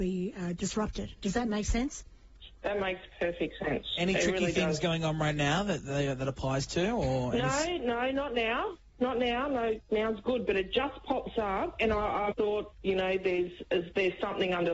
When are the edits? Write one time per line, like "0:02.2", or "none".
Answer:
0:12.3